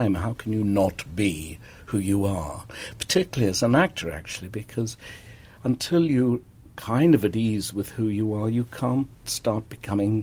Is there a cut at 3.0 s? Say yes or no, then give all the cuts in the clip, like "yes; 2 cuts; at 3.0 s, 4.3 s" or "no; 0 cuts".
no; 0 cuts